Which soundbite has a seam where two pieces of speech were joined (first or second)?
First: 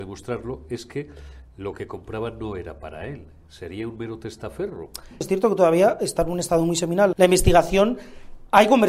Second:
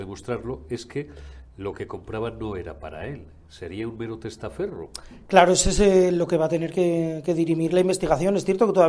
first